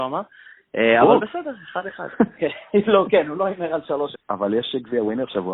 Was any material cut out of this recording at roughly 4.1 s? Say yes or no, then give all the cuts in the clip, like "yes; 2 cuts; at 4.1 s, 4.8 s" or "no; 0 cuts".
yes; 1 cut; at 4.1 s